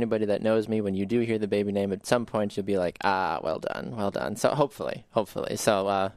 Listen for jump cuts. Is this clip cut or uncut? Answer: uncut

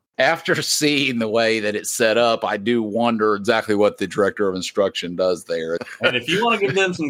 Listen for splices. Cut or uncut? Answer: cut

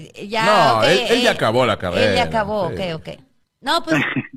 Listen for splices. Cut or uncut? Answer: cut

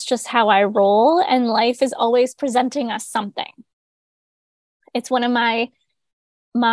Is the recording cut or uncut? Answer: uncut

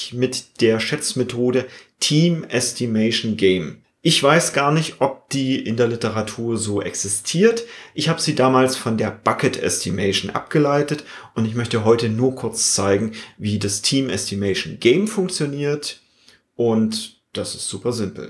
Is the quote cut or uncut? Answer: uncut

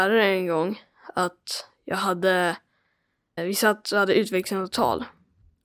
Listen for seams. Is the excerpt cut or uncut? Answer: cut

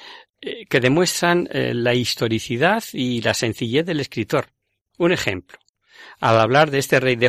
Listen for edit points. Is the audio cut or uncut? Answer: uncut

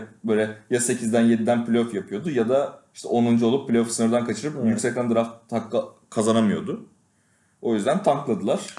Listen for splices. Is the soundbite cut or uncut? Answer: uncut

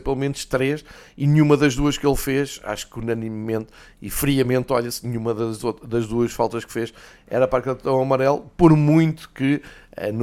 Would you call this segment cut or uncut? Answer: uncut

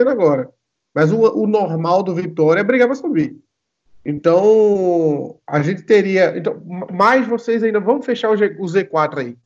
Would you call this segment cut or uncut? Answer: uncut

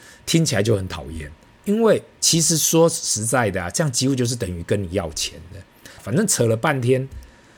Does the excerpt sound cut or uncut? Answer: cut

